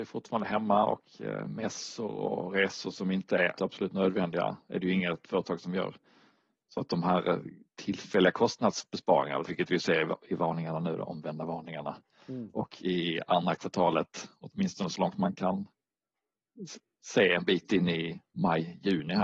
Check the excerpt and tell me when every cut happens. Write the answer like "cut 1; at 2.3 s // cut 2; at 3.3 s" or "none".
cut 1; at 3.6 s // cut 2; at 9.4 s